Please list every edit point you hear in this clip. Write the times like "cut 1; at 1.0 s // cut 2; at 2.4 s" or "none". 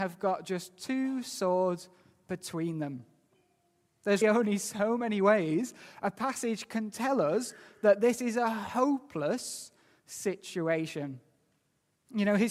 cut 1; at 4.2 s